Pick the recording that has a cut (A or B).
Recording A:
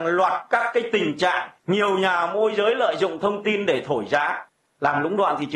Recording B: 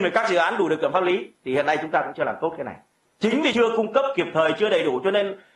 A